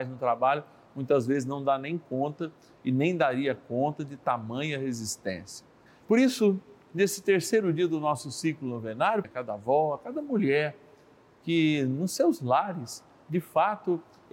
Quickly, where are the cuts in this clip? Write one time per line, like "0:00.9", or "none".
0:05.9
0:09.2

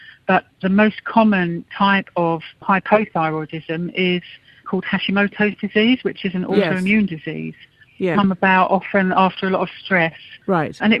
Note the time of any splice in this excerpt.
0:08.1

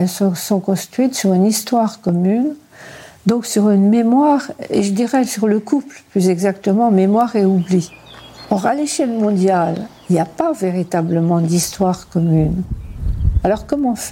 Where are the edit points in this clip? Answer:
none

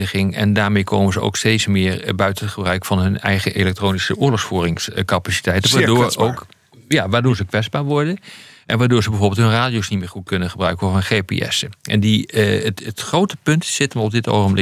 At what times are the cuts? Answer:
none

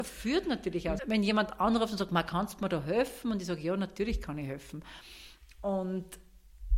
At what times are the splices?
0:01.0

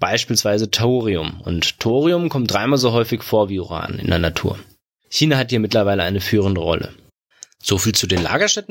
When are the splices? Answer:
0:05.0

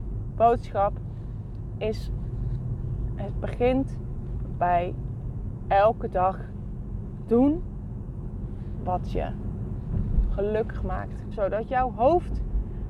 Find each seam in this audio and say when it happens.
0:11.3

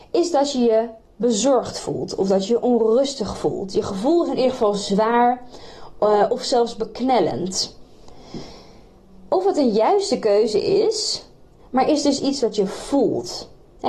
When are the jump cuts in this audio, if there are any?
0:11.6

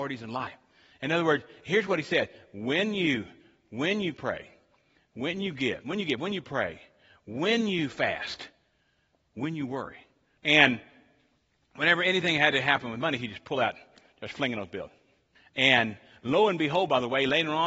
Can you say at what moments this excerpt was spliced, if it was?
0:10.4
0:15.4

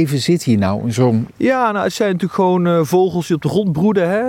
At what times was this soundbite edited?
0:01.3

